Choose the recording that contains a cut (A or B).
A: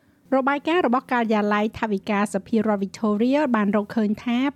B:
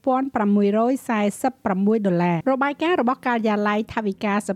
B